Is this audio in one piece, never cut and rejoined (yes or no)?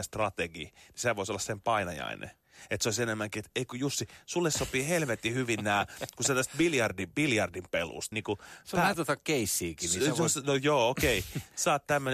no